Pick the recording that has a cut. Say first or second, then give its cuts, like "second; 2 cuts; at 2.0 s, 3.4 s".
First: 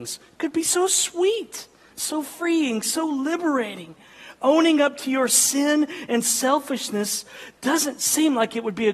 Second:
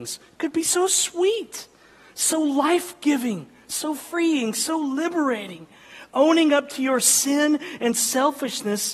first; 1 cut; at 1.9 s